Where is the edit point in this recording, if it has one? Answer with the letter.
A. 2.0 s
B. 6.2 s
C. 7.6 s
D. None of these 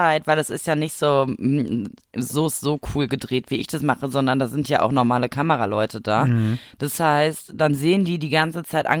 D